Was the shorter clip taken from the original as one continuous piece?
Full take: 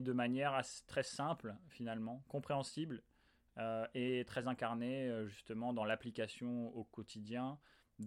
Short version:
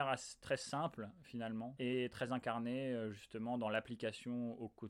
no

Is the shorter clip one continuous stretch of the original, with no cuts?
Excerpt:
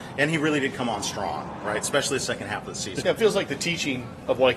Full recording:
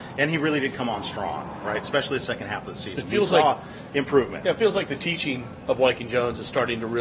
no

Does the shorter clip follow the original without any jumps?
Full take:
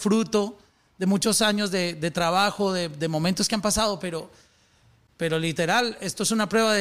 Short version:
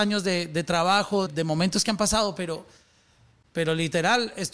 no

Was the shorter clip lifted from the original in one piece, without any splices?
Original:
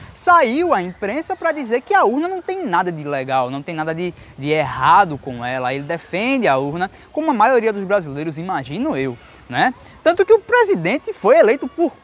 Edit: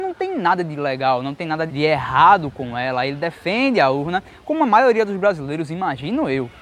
no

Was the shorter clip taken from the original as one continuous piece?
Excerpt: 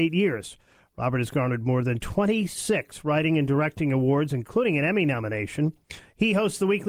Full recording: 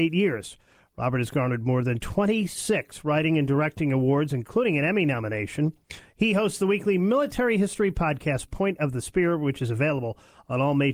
yes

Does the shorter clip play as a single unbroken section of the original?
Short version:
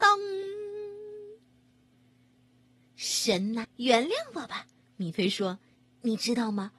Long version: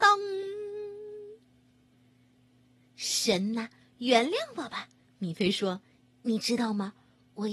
no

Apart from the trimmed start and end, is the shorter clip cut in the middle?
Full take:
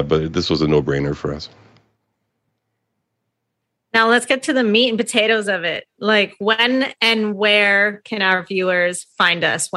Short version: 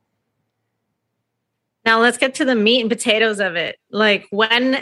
no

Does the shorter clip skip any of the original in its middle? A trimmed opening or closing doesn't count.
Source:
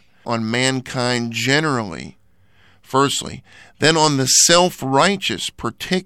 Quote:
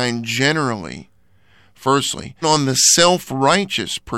yes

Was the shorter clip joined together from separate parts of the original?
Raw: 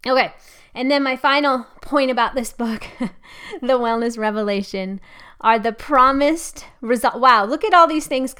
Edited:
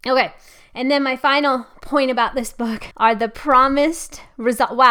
yes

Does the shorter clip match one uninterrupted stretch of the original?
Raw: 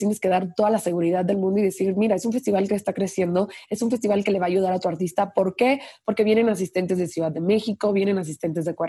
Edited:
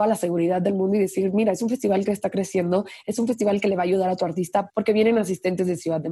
no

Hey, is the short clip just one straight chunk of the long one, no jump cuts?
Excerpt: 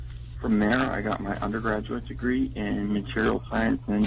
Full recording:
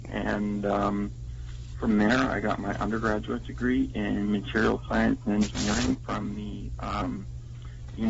yes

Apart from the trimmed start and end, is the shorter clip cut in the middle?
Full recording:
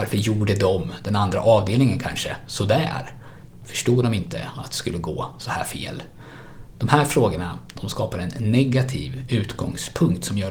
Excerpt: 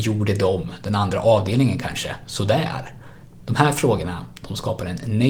yes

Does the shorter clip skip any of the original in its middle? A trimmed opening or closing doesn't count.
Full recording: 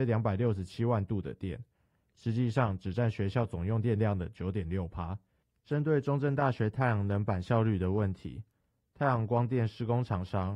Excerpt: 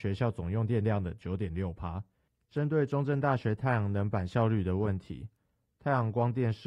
no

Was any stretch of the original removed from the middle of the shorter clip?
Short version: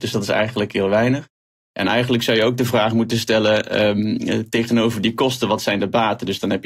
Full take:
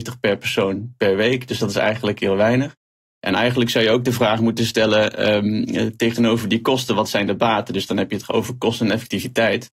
no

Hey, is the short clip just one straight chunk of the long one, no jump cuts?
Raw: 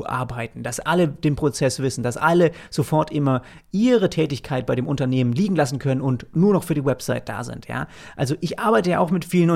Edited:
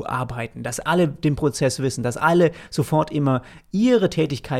yes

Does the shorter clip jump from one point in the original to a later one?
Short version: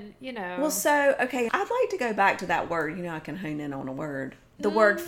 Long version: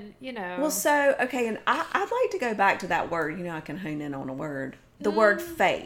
yes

